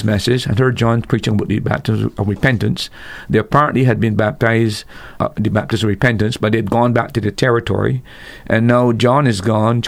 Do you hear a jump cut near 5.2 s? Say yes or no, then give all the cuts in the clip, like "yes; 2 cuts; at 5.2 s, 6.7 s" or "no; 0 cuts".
yes; 1 cut; at 5.2 s